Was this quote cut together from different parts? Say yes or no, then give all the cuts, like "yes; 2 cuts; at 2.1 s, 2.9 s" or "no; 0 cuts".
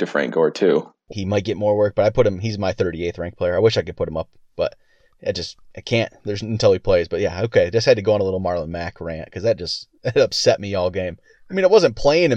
yes; 1 cut; at 1.1 s